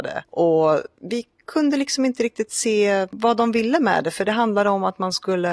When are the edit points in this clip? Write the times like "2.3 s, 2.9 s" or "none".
none